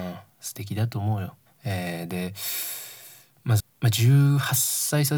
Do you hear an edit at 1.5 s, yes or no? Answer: yes